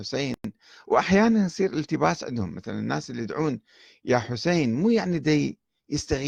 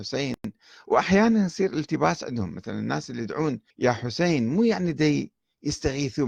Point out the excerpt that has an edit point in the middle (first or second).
second